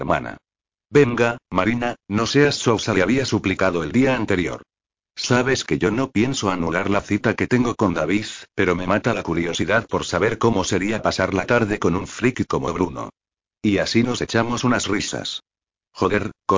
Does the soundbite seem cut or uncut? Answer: cut